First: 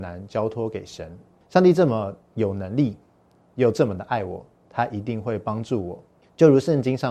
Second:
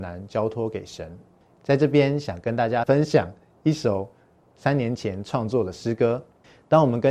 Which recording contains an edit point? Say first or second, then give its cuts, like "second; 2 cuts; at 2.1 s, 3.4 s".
second; 1 cut; at 1.5 s